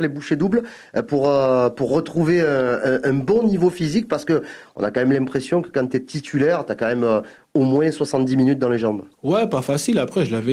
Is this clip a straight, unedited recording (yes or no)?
no